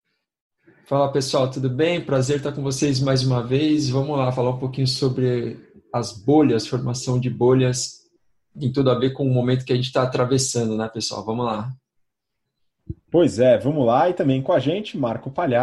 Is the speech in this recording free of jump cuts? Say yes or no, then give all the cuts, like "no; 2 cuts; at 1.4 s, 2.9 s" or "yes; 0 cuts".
yes; 0 cuts